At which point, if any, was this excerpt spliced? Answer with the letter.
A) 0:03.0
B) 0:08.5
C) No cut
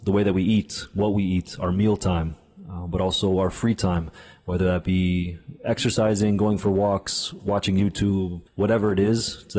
B